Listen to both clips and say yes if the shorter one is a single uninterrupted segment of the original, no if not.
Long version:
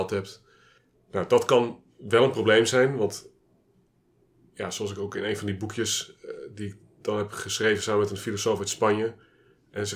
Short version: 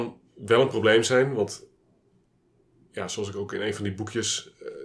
yes